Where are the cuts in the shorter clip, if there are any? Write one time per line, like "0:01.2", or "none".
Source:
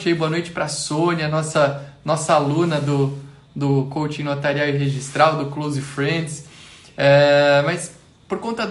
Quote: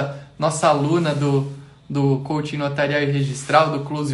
none